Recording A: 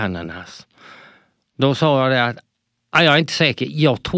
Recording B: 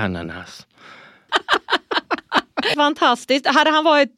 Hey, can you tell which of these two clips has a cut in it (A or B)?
B